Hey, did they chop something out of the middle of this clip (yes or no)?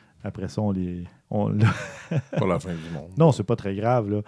no